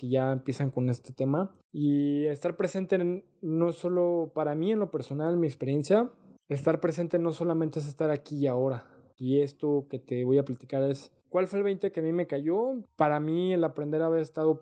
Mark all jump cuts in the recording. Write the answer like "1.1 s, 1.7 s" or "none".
9.2 s, 12.9 s